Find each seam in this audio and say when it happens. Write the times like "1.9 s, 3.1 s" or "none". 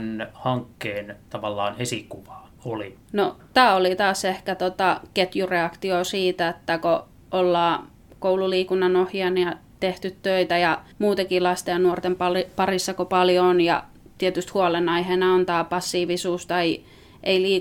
3.0 s, 10.9 s